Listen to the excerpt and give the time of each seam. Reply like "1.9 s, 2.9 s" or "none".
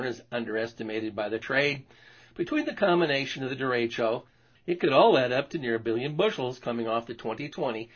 4.6 s